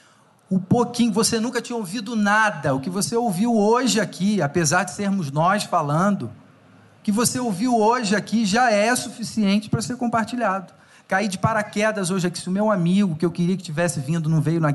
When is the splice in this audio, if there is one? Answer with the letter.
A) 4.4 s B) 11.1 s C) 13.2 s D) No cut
D